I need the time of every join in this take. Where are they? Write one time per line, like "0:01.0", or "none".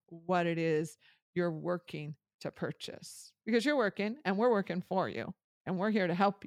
none